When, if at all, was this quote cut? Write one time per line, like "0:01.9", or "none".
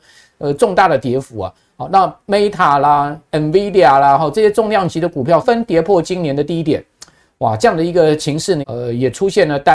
0:05.4
0:08.6